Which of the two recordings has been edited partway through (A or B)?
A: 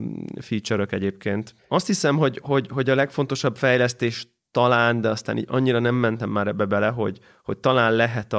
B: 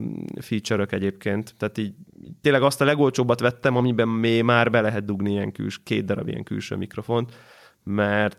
A